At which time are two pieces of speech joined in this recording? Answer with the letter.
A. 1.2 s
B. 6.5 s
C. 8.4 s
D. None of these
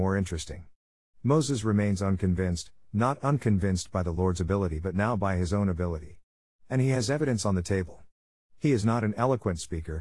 B